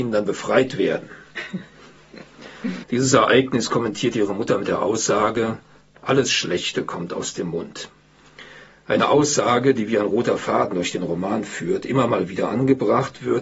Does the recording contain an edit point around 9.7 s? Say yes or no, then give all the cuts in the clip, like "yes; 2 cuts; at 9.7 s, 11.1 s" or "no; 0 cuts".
no; 1 cut; at 2.8 s